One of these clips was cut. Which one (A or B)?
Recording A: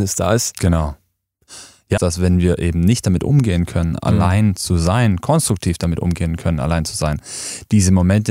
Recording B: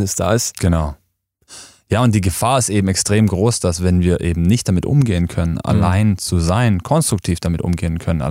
A